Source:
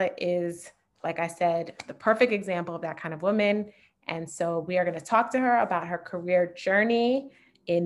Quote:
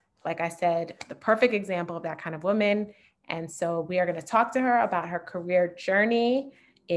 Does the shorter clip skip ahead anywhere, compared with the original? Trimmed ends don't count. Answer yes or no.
no